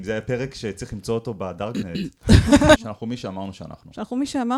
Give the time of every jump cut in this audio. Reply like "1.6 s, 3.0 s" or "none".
2.8 s